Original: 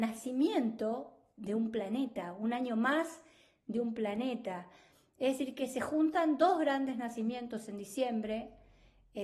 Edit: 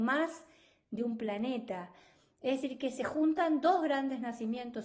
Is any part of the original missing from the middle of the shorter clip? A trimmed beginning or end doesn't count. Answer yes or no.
no